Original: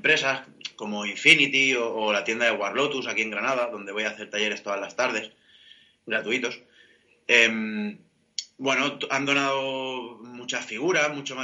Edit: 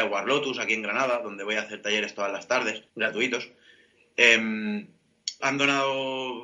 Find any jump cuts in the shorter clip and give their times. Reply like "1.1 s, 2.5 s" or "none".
2.9 s, 5.4 s